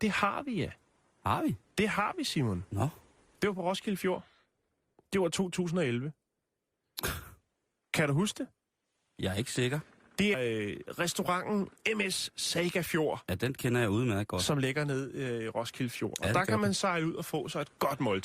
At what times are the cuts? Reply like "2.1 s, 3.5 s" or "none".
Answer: 10.3 s